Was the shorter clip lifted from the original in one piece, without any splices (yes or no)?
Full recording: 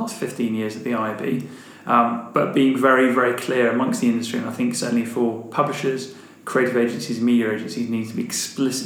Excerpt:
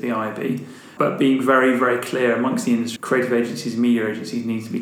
no